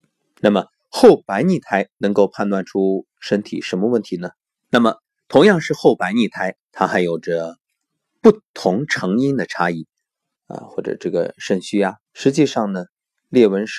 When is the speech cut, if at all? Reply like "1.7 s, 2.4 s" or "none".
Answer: 4.6 s, 10.3 s, 12.1 s